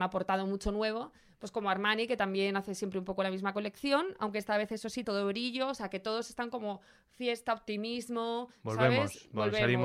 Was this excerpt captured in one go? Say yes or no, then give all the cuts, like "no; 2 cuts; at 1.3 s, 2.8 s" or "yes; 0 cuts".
no; 1 cut; at 5.0 s